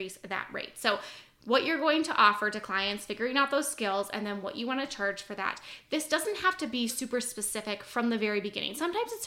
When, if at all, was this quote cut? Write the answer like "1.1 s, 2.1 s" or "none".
5.9 s, 6.9 s